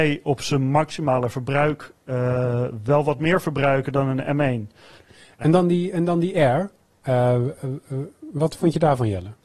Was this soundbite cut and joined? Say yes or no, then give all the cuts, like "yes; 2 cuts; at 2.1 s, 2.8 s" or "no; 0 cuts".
yes; 1 cut; at 5.0 s